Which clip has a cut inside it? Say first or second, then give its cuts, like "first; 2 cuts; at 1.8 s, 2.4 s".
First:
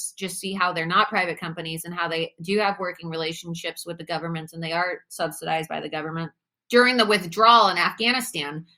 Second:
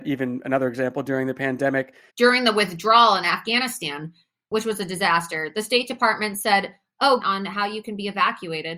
second; 2 cuts; at 2.1 s, 7.2 s